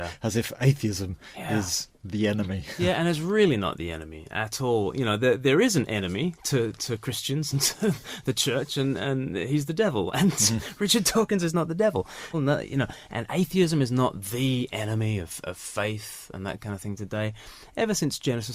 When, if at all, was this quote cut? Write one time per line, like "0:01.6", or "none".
0:12.3

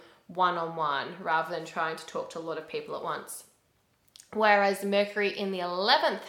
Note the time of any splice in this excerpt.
none

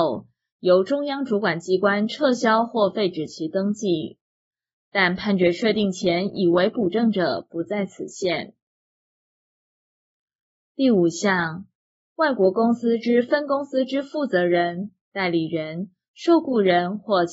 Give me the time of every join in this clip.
none

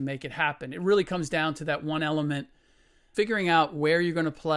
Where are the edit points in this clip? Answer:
0:03.1

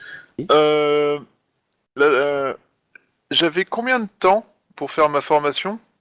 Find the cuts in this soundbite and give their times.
none

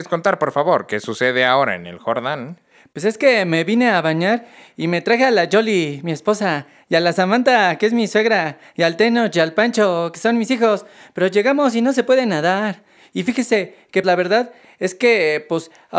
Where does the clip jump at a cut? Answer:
0:14.0

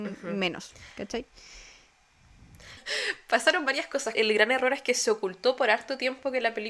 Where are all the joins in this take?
0:02.8
0:04.1

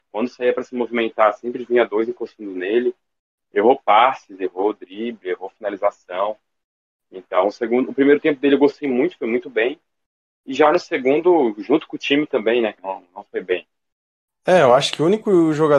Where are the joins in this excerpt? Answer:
0:12.8

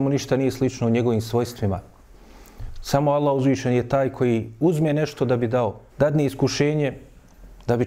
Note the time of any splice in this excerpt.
0:05.9

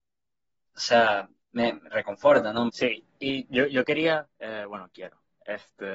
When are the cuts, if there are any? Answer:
0:02.7
0:04.3

